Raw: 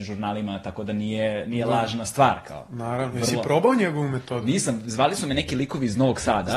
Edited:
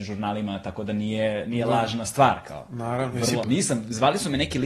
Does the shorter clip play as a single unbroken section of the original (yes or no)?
no